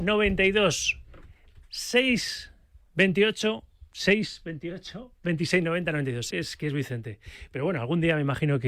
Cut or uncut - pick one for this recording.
cut